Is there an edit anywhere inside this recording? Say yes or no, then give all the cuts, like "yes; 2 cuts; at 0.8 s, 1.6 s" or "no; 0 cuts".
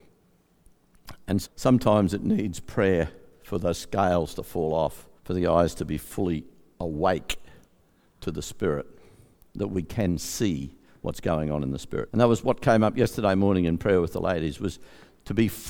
yes; 3 cuts; at 1.4 s, 5.2 s, 12.1 s